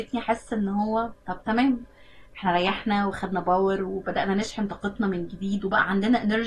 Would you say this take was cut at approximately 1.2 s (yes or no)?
yes